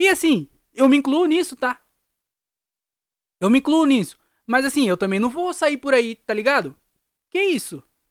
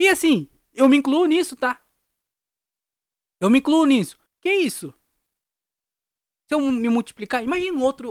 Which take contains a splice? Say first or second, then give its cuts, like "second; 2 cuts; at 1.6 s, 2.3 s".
second; 1 cut; at 4.3 s